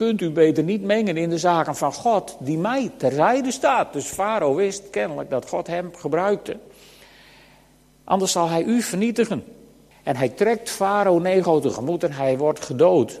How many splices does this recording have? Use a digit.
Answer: 1